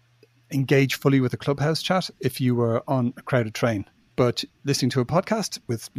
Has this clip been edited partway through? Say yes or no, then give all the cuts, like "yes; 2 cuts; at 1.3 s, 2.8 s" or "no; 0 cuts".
no; 0 cuts